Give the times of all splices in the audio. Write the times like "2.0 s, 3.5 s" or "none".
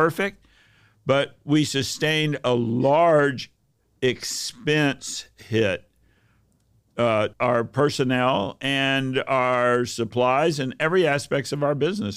7.3 s